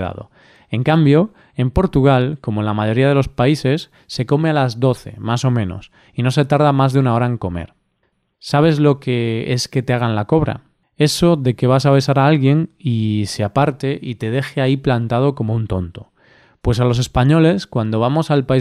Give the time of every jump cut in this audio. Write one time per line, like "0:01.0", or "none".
none